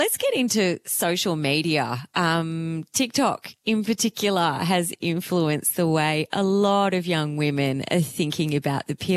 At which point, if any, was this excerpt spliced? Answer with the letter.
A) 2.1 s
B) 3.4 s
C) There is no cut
C